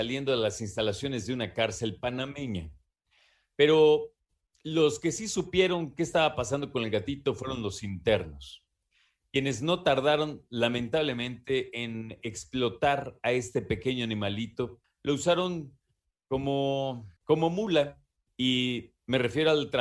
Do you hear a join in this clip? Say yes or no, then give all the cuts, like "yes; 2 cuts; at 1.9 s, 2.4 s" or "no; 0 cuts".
yes; 2 cuts; at 14.8 s, 17.2 s